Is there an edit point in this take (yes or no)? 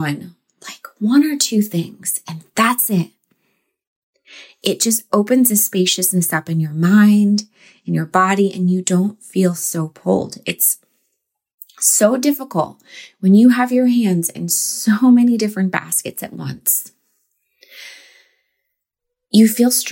no